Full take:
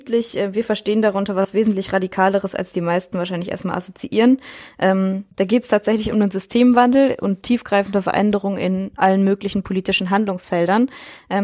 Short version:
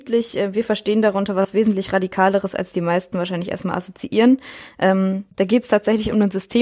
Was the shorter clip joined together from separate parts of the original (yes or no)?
no